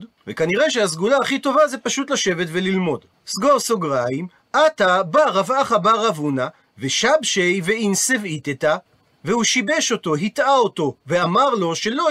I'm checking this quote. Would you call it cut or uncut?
uncut